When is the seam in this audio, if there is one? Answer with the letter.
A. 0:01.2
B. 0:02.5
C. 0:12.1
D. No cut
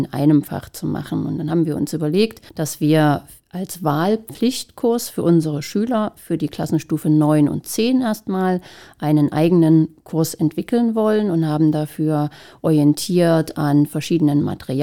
B